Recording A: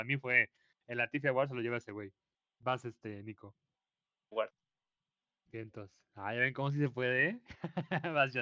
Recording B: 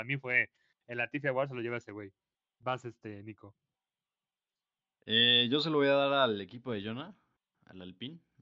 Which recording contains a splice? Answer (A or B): A